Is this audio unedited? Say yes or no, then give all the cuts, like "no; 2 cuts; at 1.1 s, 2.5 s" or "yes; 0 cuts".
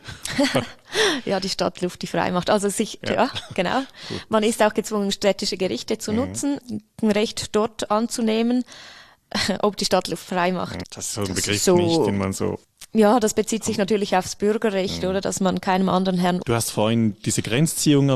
no; 3 cuts; at 3.0 s, 10.8 s, 16.4 s